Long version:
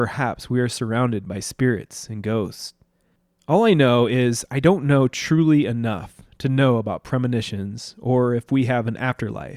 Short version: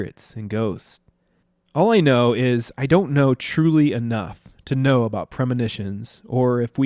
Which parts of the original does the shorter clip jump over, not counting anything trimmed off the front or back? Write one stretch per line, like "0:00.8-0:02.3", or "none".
none

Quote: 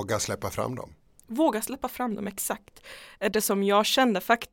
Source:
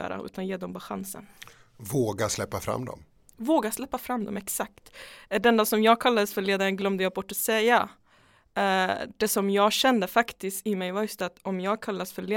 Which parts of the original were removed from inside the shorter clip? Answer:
0:05.4-0:09.2

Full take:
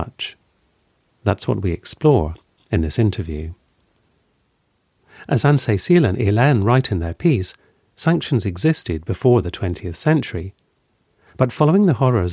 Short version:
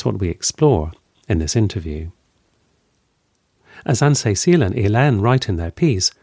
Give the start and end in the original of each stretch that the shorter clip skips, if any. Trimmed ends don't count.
none

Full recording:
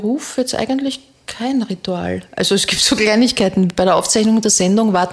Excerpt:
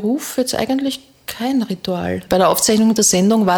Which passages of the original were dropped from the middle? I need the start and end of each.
0:02.3-0:03.7

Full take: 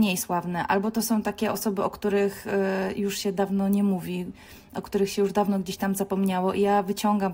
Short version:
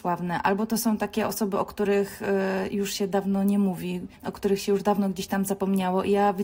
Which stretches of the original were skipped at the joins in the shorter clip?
0:04.4-0:04.6

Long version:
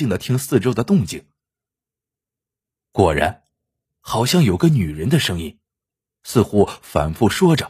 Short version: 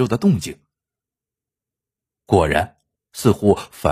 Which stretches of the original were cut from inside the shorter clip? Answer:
0:03.6-0:06.1

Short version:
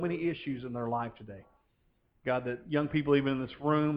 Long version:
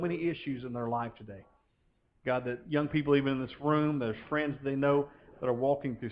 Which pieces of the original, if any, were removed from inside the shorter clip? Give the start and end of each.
none

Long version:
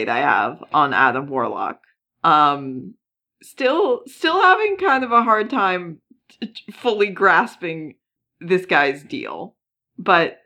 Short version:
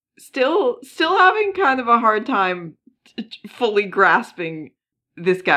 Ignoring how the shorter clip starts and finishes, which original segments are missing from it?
none

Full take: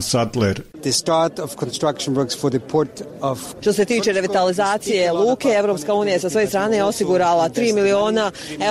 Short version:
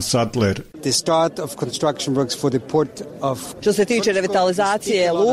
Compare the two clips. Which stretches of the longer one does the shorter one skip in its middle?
none

